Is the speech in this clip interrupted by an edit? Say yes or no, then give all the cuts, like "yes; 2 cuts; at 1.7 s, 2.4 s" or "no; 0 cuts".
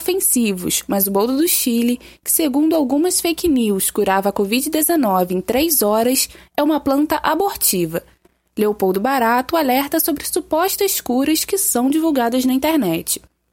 no; 0 cuts